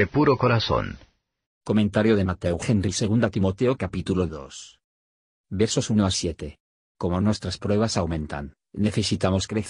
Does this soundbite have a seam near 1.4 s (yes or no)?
yes